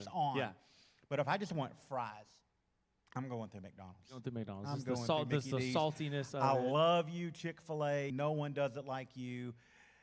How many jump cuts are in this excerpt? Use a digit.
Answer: 1